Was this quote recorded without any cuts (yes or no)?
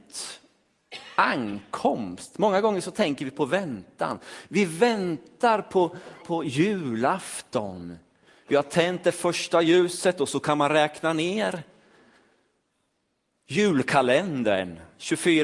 no